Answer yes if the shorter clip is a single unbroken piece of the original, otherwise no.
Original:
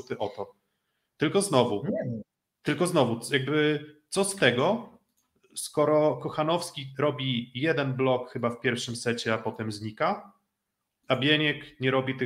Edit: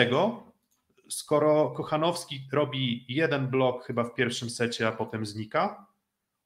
yes